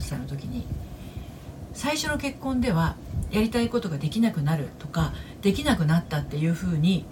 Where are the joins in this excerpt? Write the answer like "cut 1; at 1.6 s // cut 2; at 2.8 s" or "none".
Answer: none